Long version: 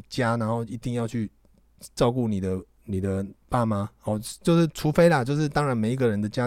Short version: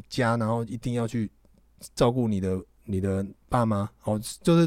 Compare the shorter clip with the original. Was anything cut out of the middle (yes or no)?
no